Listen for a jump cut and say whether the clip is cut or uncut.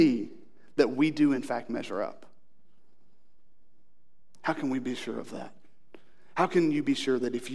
uncut